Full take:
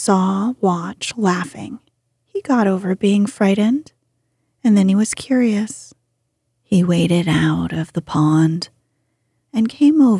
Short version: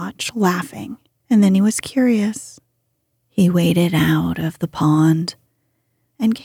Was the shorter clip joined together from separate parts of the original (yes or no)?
yes